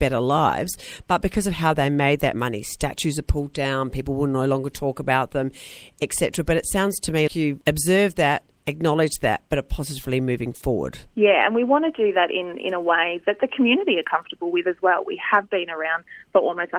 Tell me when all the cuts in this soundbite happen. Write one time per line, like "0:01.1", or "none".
0:07.3